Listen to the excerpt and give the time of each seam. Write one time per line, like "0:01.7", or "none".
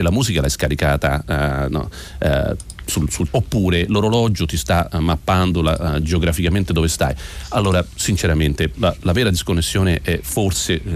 0:03.3
0:08.7

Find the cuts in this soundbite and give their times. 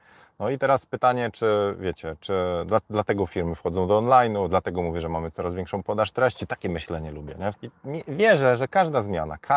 0:07.5

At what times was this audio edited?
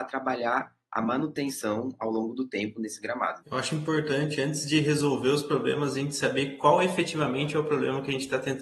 0:03.4

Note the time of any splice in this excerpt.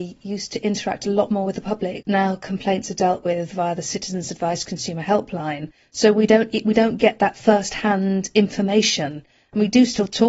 0:02.0

